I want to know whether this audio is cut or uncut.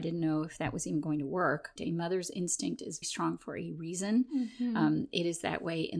cut